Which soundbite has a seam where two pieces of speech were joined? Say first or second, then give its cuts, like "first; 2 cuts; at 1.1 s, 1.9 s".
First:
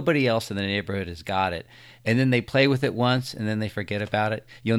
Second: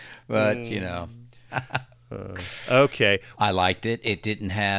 second; 2 cuts; at 1.5 s, 3.3 s